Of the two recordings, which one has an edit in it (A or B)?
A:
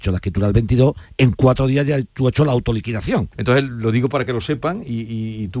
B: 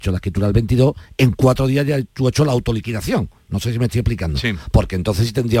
A